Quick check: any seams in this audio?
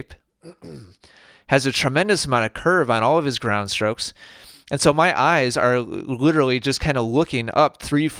no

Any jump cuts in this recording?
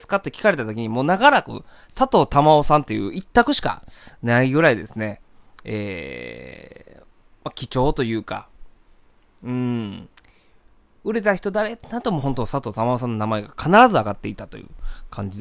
no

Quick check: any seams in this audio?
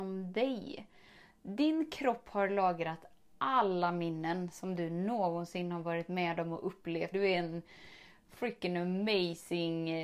yes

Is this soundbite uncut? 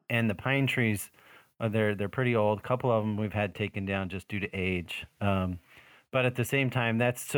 yes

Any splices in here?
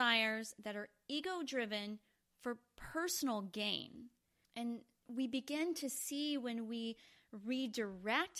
yes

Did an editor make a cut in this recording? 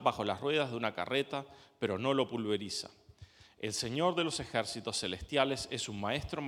no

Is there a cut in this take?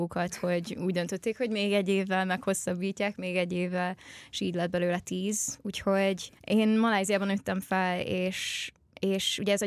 yes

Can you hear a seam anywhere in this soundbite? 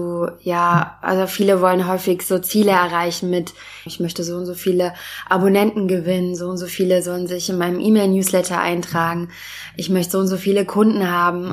yes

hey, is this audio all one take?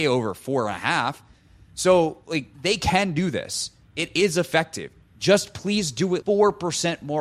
no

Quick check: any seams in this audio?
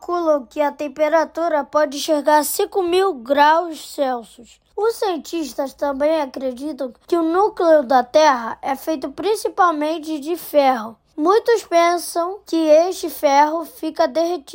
no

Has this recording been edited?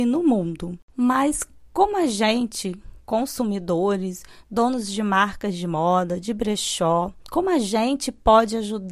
yes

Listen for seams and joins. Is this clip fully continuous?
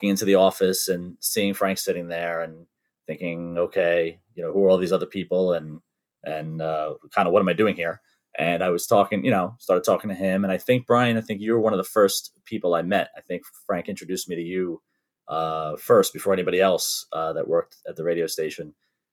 yes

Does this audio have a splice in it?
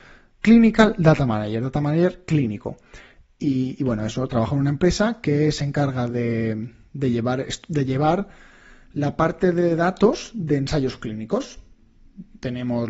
no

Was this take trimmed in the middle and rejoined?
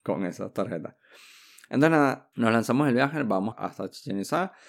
yes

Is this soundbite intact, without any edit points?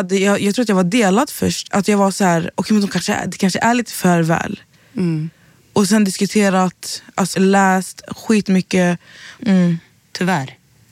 no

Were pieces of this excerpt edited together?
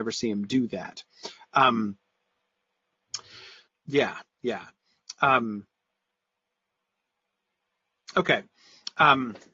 yes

